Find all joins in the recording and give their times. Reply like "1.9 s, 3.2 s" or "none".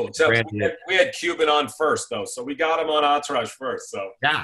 none